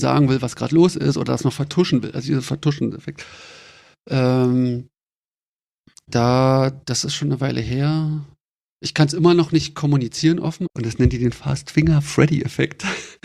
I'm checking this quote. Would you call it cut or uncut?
cut